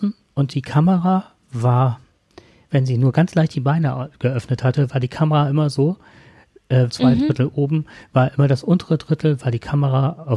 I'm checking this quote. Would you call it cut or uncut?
cut